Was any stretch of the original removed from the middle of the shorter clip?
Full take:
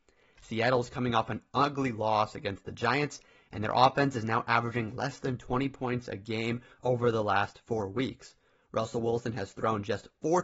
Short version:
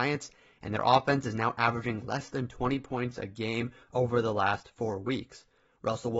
no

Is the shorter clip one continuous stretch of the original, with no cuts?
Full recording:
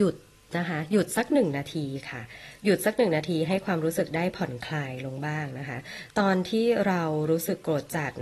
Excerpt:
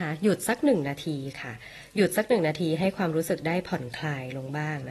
yes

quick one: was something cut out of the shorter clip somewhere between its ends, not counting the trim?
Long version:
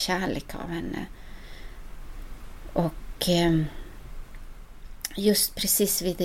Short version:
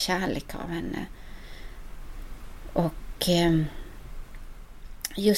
no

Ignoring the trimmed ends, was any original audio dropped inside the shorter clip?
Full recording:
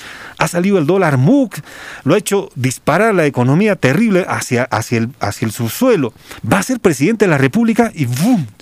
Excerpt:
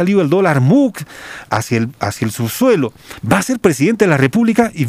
yes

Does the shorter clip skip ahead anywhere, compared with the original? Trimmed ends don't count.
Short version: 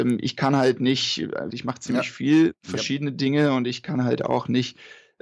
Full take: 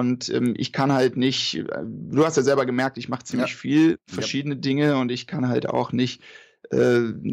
yes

